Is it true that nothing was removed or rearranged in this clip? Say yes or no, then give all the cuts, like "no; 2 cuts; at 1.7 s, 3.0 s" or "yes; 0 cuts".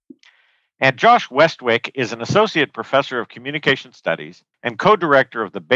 no; 1 cut; at 4.5 s